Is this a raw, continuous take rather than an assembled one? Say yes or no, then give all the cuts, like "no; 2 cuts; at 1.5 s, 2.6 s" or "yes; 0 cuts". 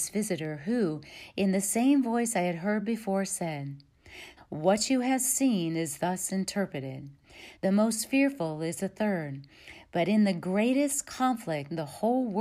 no; 2 cuts; at 4.4 s, 7.6 s